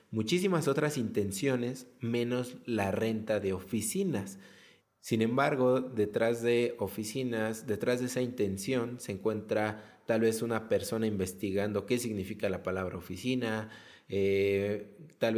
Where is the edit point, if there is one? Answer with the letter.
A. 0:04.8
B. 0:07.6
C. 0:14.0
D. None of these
A